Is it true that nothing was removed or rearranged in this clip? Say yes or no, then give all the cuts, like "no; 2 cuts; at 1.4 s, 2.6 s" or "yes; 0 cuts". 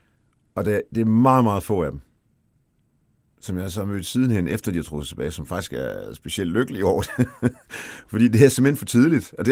yes; 0 cuts